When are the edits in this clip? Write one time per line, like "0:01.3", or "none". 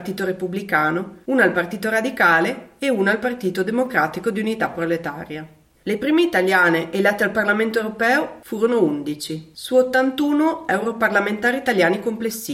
0:05.7